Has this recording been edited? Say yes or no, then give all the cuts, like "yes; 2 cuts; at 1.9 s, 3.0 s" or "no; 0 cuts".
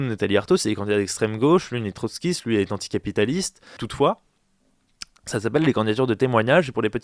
yes; 1 cut; at 3.8 s